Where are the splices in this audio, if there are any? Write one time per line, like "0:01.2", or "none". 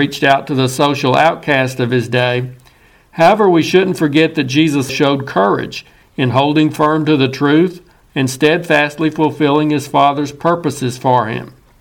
0:04.9
0:08.1